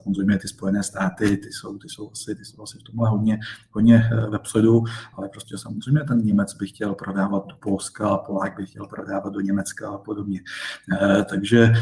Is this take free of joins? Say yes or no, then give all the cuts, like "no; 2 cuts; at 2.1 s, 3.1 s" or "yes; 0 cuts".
yes; 0 cuts